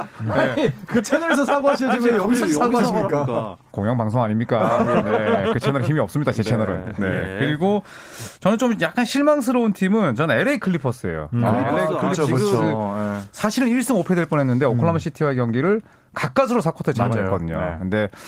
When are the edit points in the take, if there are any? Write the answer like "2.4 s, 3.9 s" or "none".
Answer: none